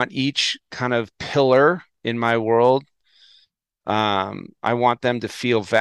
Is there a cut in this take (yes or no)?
no